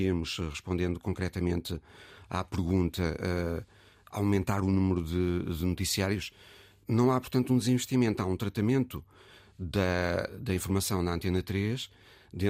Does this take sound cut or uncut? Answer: cut